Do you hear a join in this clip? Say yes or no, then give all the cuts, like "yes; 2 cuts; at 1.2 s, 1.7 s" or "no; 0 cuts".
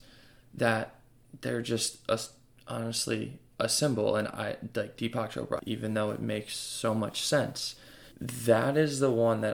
yes; 2 cuts; at 5.6 s, 8.1 s